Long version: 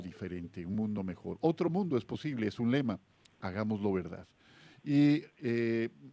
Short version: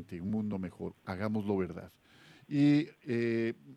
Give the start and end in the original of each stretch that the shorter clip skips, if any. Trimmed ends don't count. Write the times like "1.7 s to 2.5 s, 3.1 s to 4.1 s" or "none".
1.4 s to 3.3 s